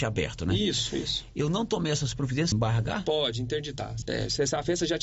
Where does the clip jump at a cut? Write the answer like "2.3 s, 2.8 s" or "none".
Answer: 2.5 s, 4.0 s

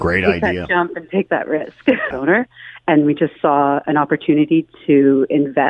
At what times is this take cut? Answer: 2.1 s

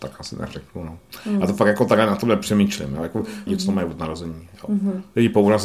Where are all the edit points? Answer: 3.5 s

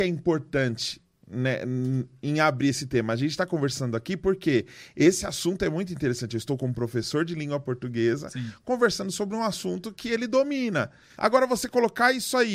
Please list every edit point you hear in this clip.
11.1 s

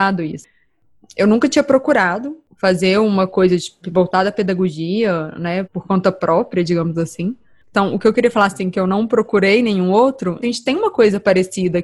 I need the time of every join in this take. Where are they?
5.6 s, 7.6 s, 10.4 s

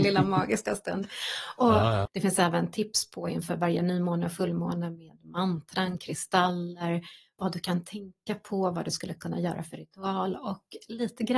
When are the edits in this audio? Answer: 2.1 s

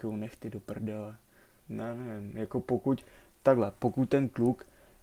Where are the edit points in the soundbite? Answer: 1.6 s

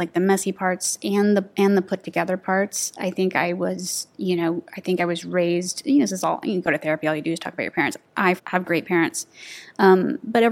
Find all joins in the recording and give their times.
8.4 s

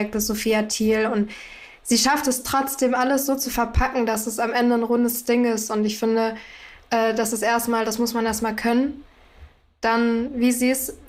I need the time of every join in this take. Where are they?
none

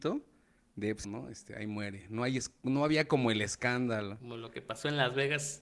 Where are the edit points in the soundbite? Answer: 1.0 s

